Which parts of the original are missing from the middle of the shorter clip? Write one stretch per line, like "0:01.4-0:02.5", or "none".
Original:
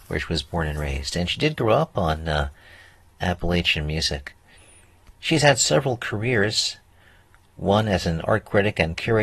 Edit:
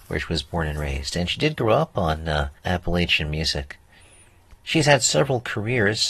0:02.6-0:03.1